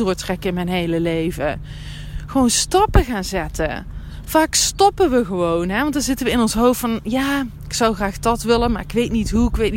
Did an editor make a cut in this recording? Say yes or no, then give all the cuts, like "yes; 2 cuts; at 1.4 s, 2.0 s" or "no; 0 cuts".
no; 0 cuts